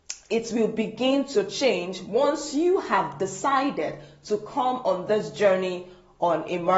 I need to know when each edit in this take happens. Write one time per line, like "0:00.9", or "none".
none